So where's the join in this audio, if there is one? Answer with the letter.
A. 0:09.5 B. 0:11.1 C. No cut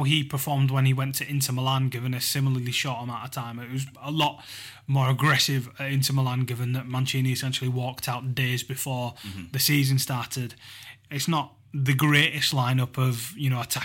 B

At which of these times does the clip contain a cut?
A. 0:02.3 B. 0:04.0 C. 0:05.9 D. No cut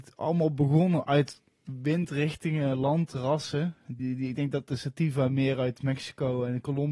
B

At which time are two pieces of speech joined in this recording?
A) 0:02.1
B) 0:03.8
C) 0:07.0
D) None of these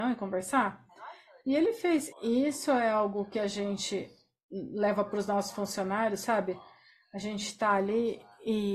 A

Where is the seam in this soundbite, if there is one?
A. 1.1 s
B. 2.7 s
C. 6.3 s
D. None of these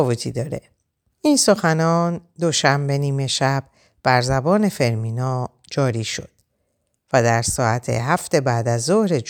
A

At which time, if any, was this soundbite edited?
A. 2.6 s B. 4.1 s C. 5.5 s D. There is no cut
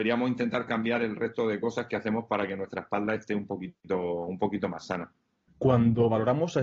C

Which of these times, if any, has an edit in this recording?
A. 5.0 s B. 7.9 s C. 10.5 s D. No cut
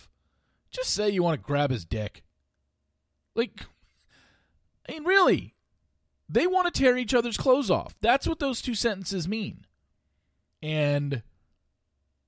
C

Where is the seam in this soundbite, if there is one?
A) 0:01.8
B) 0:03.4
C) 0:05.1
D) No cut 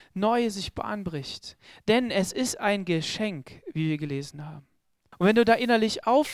C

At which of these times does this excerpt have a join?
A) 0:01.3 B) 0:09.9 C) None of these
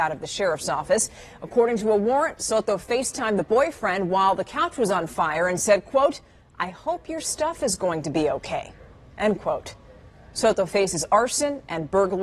C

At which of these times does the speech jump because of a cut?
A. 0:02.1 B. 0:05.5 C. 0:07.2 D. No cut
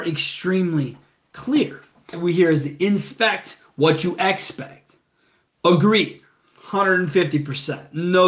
A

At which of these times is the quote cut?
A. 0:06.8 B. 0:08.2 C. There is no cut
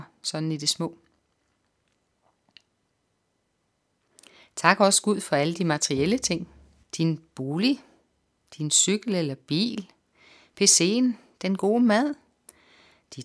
A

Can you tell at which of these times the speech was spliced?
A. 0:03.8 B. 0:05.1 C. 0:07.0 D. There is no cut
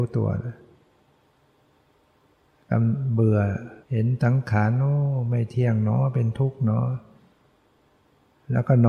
A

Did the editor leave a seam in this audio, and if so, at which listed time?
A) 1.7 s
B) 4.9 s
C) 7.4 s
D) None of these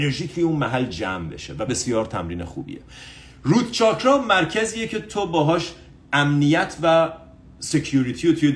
A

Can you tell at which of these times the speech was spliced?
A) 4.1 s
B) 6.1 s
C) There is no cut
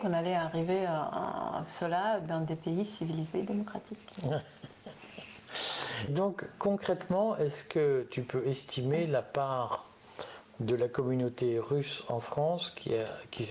B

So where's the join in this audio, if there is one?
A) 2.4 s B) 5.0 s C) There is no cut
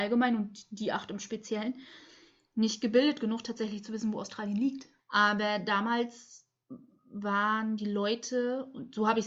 B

